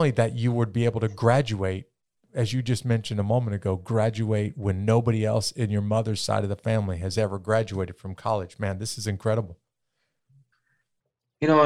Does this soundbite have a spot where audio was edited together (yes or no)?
no